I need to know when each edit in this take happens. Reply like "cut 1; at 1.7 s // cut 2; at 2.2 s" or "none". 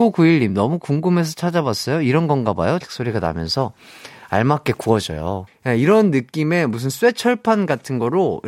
cut 1; at 2.8 s // cut 2; at 5.5 s